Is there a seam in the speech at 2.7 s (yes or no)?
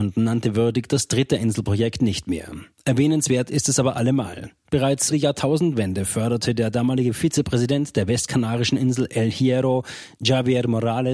no